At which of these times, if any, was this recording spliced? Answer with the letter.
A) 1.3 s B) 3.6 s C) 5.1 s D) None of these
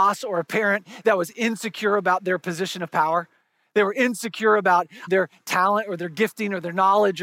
C